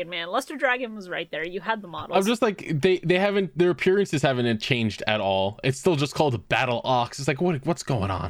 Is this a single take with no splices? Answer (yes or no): yes